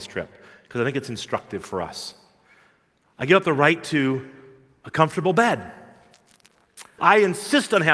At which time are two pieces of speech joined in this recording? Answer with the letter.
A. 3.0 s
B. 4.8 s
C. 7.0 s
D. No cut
C